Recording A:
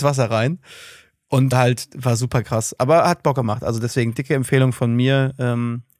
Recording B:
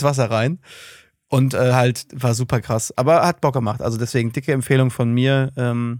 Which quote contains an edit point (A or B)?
A